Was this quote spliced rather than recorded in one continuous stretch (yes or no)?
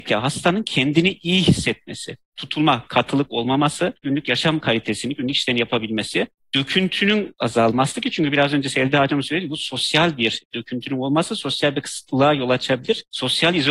yes